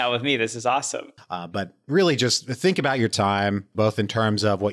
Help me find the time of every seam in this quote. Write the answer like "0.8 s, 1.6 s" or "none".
1.2 s, 3.7 s